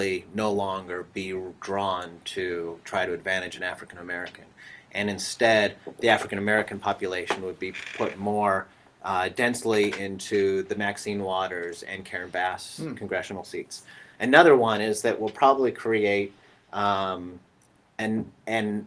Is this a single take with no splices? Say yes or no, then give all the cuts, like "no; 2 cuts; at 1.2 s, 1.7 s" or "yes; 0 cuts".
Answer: no; 1 cut; at 14.1 s